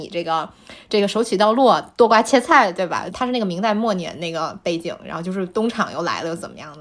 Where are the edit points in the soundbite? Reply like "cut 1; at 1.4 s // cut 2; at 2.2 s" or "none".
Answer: cut 1; at 3.1 s

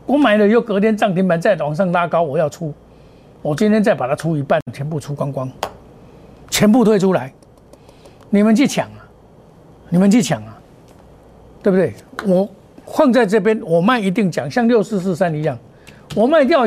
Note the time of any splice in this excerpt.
none

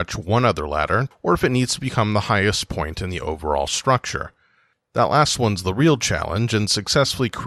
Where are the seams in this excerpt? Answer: cut 1; at 1.1 s

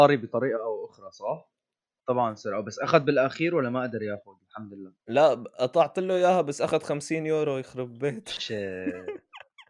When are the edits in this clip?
cut 1; at 2.0 s // cut 2; at 5.0 s

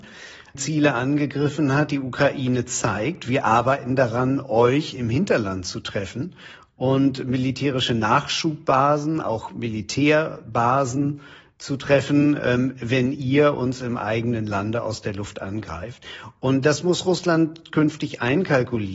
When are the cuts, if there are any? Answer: none

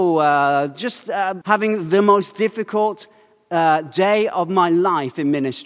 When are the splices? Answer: cut 1; at 1.4 s

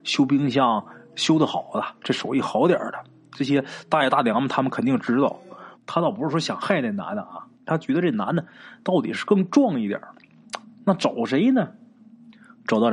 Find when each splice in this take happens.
cut 1; at 5.7 s // cut 2; at 7.5 s

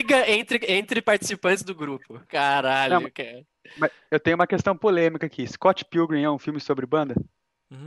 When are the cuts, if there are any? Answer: cut 1; at 2.3 s

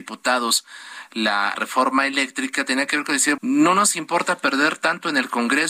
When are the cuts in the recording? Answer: cut 1; at 1.5 s // cut 2; at 3.4 s

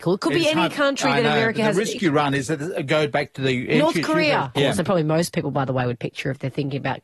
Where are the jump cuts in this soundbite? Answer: cut 1; at 4.6 s

